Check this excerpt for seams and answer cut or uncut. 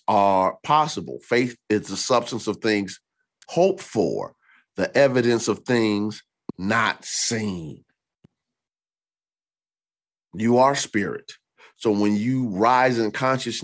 uncut